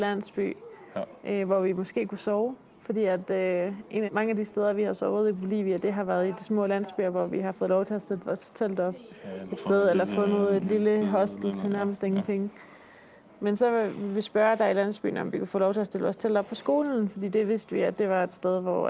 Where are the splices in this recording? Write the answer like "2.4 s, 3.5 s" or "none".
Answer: 4.1 s